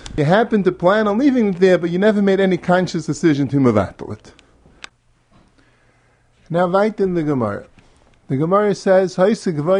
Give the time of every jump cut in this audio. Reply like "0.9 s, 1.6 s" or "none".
none